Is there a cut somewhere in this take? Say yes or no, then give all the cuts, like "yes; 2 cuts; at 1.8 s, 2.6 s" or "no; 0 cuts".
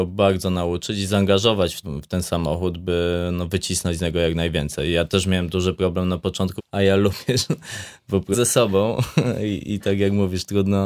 yes; 3 cuts; at 1.8 s, 6.6 s, 8.3 s